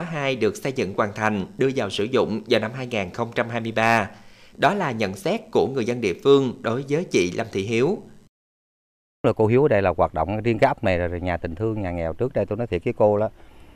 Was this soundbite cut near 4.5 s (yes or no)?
yes